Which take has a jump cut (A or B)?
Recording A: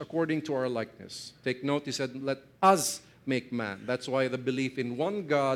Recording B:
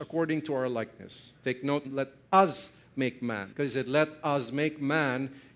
B